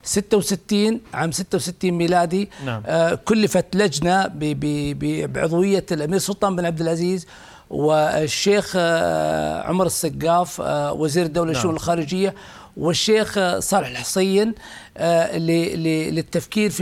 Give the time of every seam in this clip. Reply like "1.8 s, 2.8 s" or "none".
none